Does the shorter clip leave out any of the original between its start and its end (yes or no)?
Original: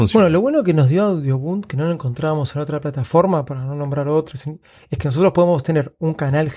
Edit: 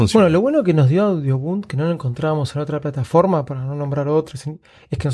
no